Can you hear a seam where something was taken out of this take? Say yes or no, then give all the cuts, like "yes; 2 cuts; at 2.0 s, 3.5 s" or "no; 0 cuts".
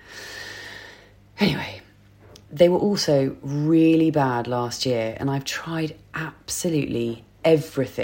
no; 0 cuts